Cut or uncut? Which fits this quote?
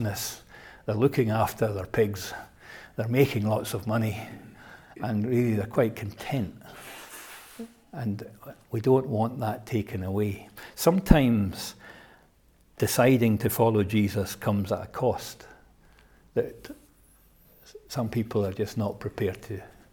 uncut